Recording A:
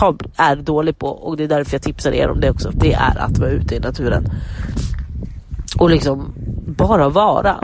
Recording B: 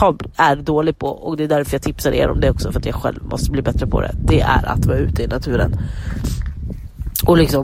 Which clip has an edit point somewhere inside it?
A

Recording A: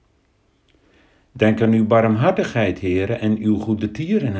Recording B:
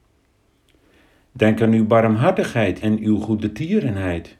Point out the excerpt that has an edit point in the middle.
B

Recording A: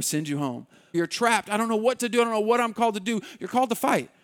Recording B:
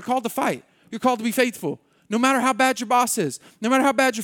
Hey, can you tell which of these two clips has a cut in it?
A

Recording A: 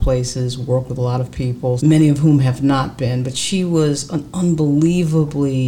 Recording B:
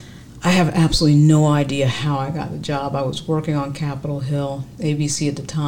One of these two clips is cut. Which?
A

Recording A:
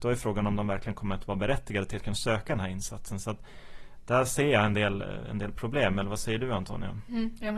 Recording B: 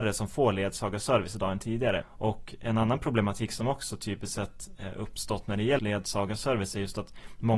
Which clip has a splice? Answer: B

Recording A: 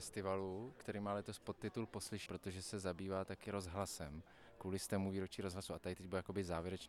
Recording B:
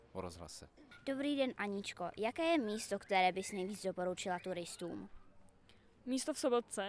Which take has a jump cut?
A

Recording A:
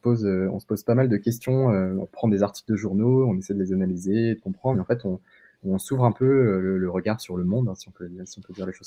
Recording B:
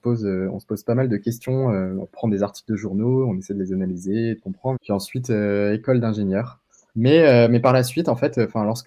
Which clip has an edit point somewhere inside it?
B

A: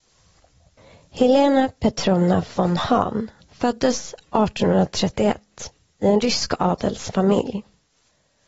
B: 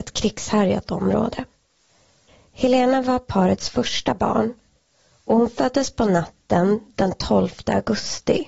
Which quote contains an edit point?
A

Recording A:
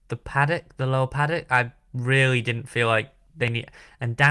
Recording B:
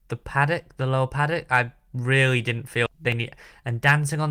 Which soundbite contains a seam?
B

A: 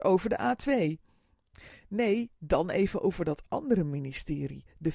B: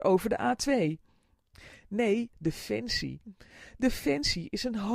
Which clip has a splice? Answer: B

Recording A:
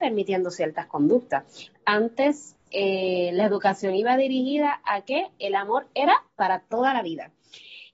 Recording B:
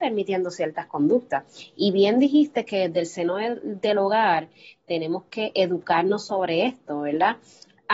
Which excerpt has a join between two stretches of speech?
A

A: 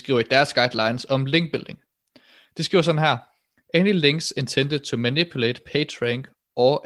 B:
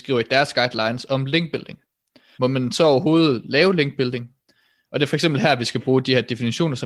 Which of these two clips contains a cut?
B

